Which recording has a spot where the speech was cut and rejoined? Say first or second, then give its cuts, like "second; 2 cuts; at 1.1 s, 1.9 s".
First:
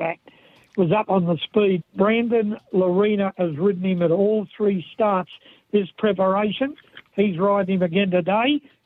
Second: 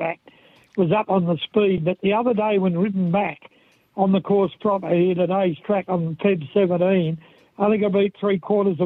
first; 1 cut; at 1.8 s